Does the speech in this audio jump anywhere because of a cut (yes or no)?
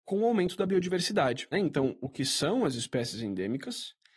yes